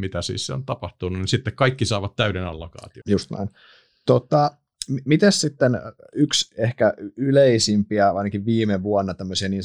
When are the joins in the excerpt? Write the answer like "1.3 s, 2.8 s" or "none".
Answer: 3.0 s